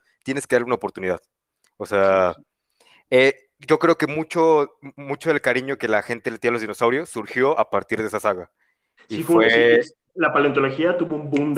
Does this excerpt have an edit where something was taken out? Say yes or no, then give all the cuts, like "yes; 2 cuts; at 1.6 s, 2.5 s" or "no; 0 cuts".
no; 0 cuts